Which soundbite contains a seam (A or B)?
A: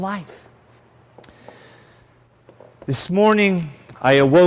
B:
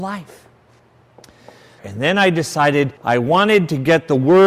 B